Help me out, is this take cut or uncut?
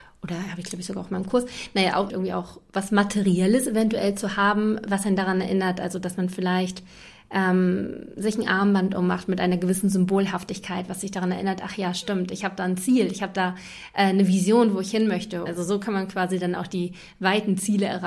cut